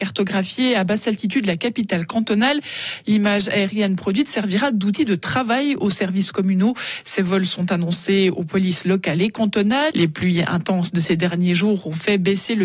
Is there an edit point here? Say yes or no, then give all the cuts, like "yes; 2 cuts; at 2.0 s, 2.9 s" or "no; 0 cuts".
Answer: yes; 1 cut; at 9.9 s